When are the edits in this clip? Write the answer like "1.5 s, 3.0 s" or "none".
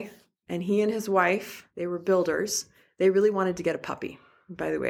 none